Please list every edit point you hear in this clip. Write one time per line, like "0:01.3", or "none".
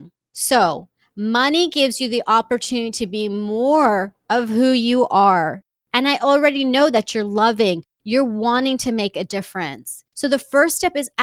0:07.9
0:10.1